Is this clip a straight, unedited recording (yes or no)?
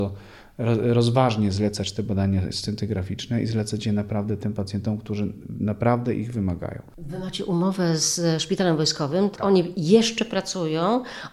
yes